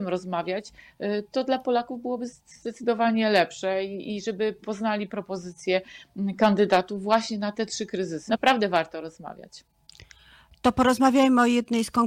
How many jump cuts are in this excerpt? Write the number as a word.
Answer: one